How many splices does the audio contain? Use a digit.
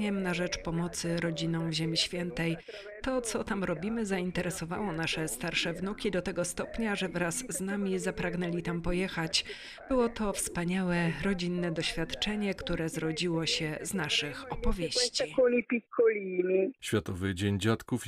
0